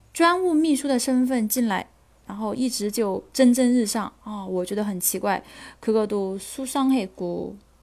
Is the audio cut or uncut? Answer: uncut